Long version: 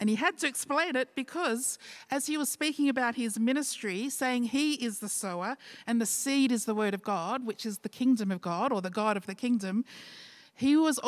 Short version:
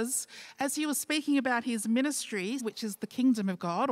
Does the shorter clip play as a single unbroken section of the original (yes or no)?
no